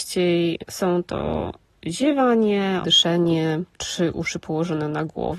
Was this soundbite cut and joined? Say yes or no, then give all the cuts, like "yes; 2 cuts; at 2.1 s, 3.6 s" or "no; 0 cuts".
yes; 1 cut; at 2.8 s